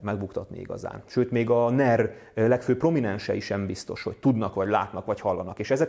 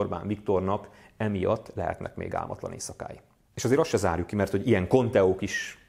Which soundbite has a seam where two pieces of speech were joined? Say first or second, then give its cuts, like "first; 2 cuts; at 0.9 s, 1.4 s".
first; 1 cut; at 1.1 s